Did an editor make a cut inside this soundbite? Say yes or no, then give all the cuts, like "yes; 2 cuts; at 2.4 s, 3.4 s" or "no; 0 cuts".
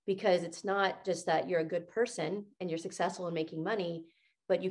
no; 0 cuts